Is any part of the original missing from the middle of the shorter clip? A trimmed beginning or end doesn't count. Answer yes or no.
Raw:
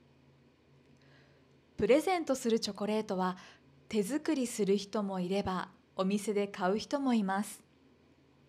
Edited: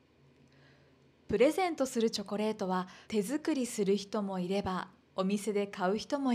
yes